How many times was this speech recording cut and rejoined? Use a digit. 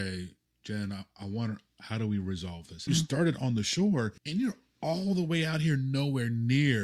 2